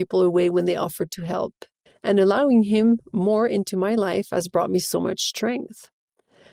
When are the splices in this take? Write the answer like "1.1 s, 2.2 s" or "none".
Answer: 1.9 s